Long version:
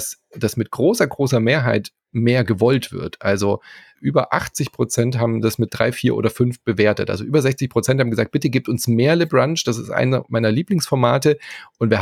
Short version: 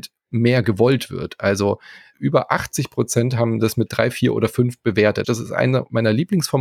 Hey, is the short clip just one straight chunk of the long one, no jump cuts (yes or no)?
no